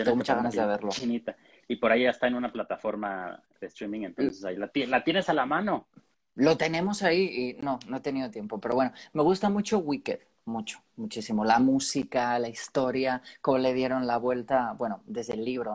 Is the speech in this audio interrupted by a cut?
no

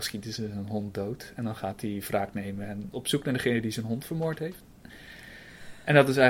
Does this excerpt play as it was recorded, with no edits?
yes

